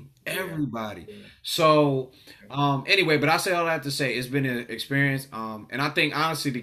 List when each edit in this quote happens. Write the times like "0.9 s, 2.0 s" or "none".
none